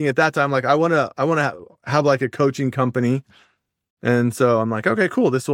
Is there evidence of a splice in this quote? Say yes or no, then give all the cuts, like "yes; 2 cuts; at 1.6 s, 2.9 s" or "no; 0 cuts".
no; 0 cuts